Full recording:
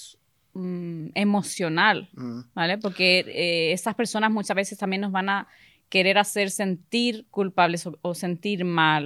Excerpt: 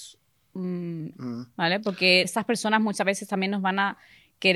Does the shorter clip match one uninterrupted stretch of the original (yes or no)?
no